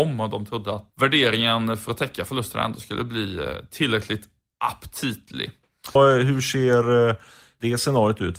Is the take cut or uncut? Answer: cut